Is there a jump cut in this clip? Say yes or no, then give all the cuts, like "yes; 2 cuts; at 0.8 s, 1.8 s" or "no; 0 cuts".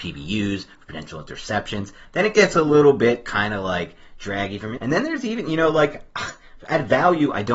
yes; 2 cuts; at 2.1 s, 4.8 s